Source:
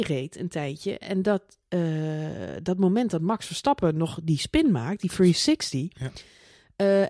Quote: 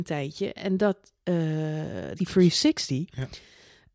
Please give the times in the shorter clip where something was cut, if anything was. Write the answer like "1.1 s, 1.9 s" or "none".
2.1 s

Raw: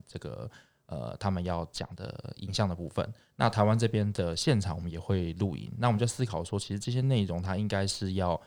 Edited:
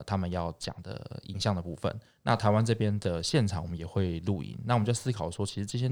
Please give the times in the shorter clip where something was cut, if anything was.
none

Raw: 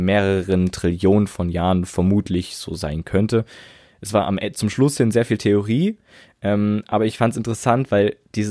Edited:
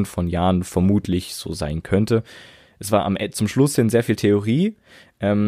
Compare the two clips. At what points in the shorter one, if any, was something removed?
none

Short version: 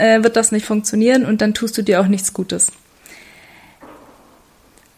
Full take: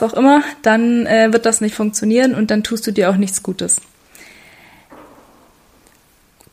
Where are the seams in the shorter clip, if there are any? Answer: none

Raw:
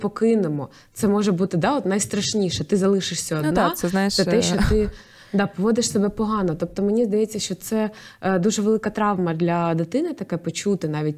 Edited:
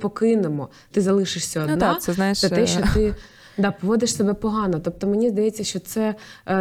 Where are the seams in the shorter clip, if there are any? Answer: 0.9 s

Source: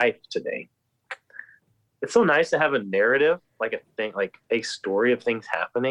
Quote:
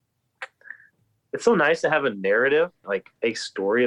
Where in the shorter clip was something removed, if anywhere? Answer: 2.8 s

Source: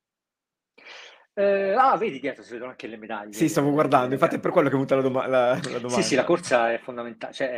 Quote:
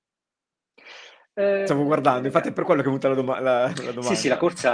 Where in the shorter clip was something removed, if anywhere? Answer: 1.7 s

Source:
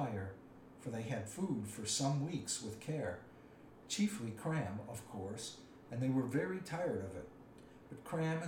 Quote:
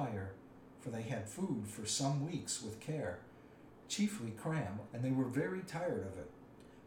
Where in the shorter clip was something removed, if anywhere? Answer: 4.9 s

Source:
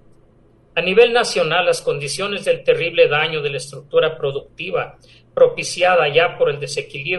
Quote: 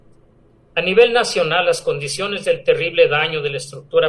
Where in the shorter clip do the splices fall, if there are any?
none

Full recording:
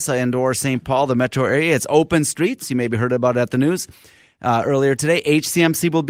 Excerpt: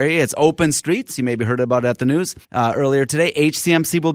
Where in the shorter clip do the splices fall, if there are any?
2.4 s

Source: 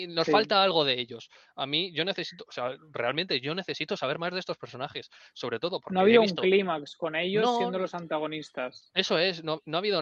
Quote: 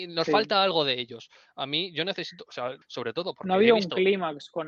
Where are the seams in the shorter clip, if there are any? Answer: 2.8 s

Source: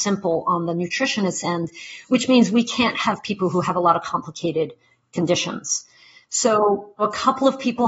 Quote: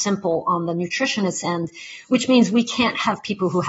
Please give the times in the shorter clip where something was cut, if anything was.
none

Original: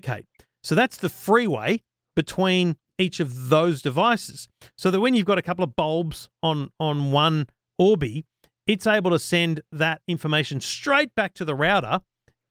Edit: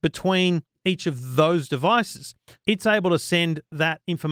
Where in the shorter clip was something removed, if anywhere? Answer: 2.6 s

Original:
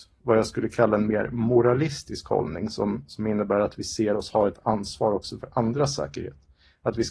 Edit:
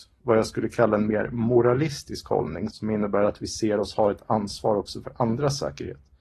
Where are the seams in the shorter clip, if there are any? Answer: 2.7 s

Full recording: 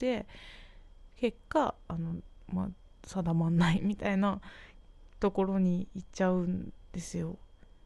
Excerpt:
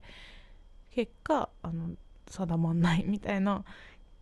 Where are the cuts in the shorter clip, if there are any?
2.2 s

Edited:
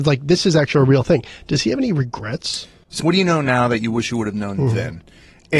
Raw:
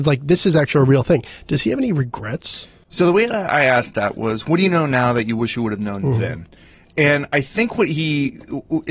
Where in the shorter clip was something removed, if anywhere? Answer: 3.0 s

